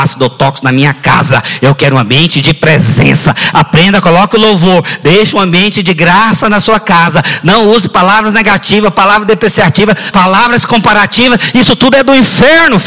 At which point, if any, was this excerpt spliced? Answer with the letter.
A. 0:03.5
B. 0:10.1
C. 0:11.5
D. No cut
B